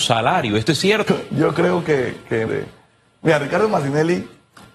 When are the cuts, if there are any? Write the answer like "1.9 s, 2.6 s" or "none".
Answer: 1.1 s, 2.5 s

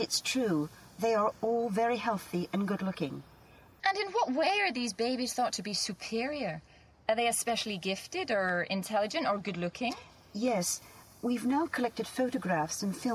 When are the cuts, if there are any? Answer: 3.8 s

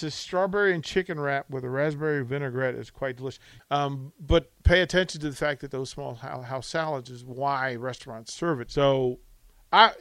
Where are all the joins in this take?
3.6 s, 8.7 s

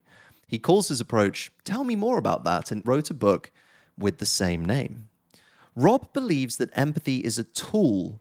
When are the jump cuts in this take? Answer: 2.8 s

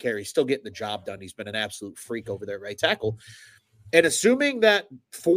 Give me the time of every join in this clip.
none

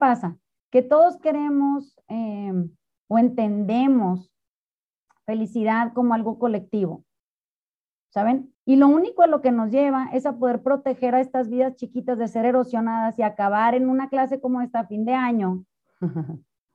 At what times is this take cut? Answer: 8.5 s

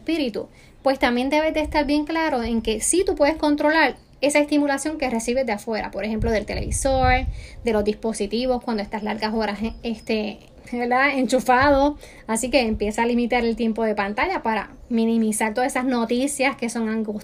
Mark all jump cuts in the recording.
none

